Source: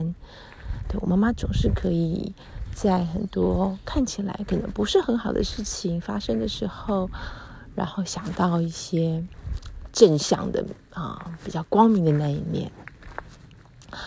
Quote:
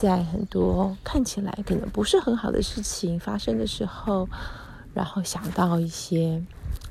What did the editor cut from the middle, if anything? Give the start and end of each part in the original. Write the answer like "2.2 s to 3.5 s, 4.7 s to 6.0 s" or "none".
none